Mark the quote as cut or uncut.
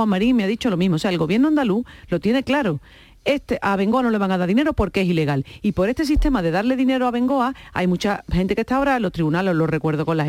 uncut